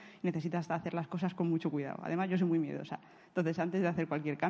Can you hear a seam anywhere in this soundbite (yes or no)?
no